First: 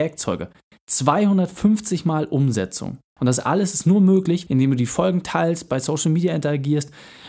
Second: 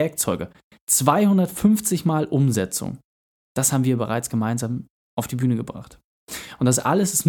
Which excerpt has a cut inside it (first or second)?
first